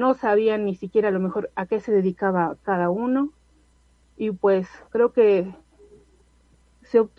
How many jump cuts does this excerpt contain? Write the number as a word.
one